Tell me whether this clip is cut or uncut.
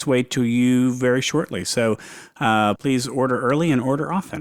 cut